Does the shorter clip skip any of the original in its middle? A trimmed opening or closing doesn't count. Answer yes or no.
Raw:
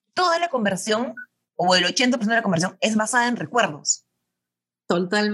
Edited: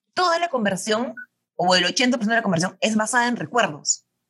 no